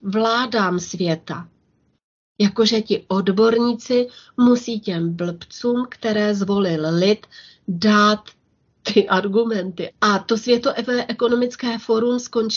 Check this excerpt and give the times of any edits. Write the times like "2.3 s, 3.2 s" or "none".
9.9 s